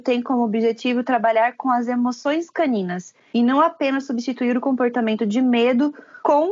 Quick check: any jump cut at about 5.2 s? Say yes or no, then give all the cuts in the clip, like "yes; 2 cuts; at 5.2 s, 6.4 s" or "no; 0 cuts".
no; 0 cuts